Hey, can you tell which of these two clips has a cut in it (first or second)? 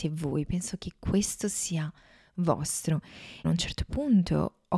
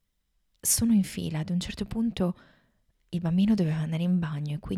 first